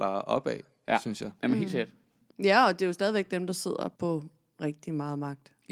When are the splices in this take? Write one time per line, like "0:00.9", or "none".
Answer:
0:02.3
0:03.9